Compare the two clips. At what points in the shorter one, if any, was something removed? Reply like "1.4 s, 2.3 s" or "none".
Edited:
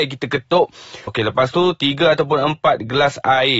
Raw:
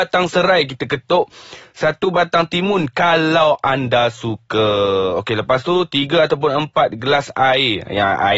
1.1 s